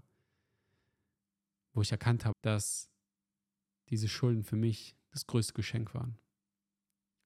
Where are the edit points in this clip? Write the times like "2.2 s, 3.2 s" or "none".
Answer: 2.3 s